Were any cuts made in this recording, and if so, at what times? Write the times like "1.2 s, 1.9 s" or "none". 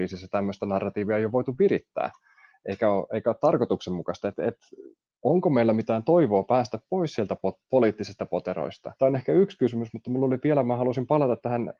9.0 s